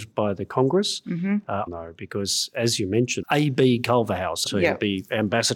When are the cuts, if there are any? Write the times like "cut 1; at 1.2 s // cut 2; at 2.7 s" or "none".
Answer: cut 1; at 1.7 s // cut 2; at 3.2 s // cut 3; at 4.5 s